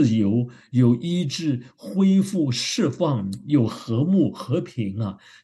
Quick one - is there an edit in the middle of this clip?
no; 0 cuts

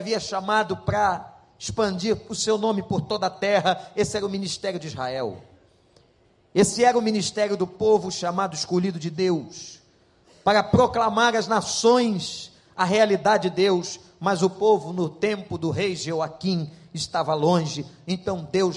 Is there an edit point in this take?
no; 0 cuts

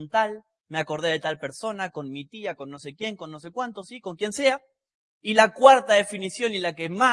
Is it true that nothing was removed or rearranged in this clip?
yes; 0 cuts

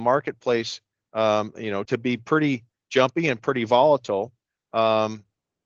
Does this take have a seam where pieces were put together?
yes; 1 cut; at 1.9 s

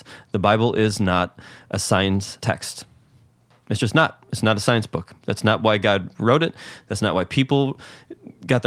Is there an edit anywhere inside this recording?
no; 0 cuts

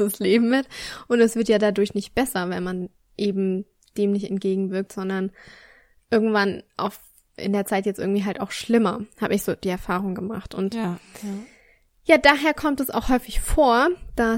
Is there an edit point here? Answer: no; 0 cuts

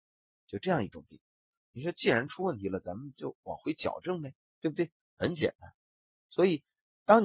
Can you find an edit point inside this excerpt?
no; 0 cuts

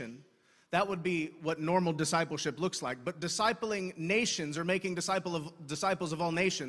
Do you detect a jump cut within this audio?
no; 0 cuts

